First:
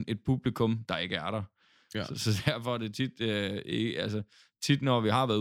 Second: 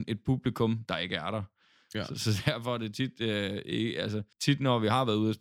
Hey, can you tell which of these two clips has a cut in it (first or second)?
second